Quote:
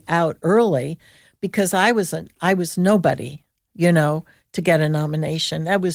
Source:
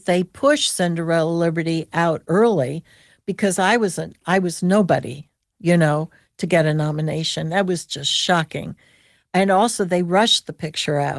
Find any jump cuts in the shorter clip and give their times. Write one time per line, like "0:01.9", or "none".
none